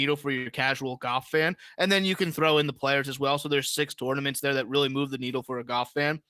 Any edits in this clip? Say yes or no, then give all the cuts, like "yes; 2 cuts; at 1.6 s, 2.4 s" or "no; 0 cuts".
no; 0 cuts